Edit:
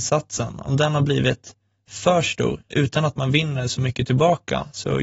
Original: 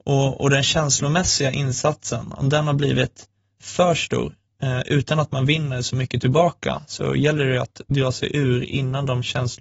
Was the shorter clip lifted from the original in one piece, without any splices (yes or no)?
no